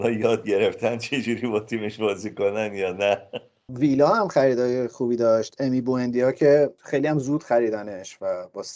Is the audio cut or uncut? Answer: uncut